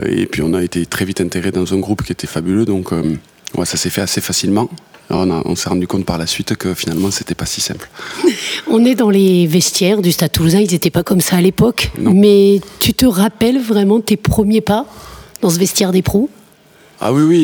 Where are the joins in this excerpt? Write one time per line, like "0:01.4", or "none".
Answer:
none